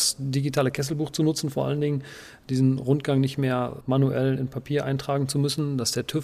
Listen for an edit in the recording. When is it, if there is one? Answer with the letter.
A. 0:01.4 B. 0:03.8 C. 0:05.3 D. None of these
B